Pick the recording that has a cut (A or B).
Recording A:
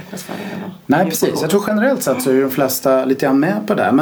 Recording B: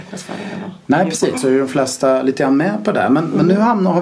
B